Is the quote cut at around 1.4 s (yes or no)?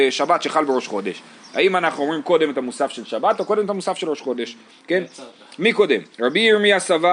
no